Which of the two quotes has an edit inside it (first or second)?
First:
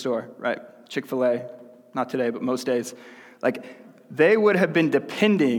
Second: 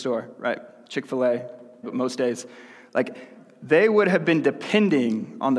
second